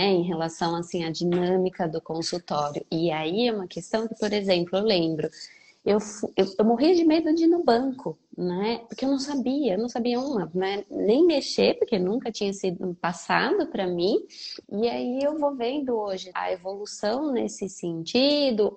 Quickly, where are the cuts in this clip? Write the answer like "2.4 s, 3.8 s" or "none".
14.6 s, 16.3 s